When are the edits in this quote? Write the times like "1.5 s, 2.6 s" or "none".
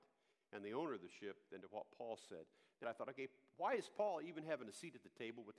2.8 s